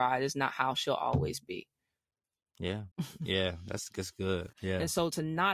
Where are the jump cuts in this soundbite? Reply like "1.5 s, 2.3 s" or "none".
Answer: 2.9 s, 4.5 s